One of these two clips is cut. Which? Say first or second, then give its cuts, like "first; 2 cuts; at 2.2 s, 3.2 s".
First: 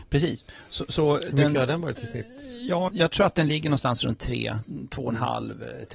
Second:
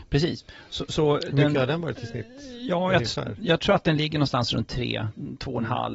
first; 1 cut; at 2.9 s